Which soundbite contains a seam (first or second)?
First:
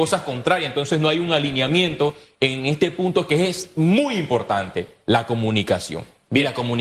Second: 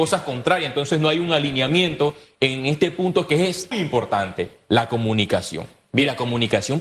second